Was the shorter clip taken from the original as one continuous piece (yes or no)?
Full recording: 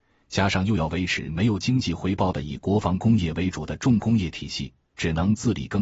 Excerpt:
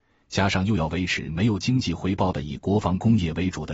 yes